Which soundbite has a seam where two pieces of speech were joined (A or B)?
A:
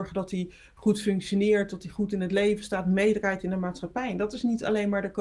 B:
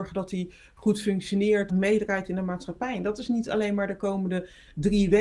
B